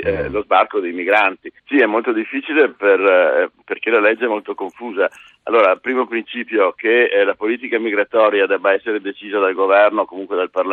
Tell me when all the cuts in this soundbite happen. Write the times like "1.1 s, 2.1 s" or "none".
1.6 s